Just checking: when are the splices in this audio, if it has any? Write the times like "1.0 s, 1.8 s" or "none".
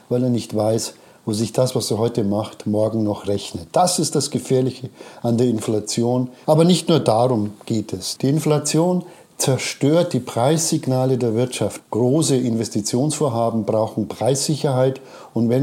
6.4 s, 8.2 s, 11.8 s